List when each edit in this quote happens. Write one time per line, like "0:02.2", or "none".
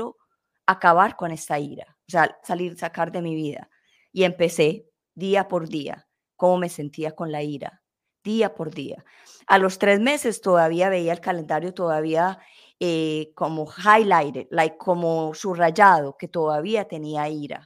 0:02.4
0:04.9